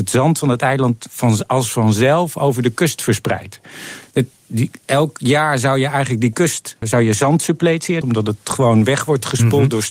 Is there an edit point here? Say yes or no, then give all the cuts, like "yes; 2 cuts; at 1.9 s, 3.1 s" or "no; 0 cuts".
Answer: yes; 3 cuts; at 4.1 s, 6.8 s, 8.0 s